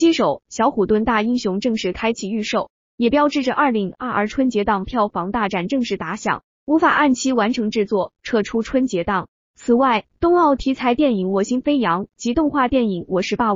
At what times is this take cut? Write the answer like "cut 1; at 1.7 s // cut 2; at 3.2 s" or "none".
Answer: cut 1; at 6.5 s // cut 2; at 9.5 s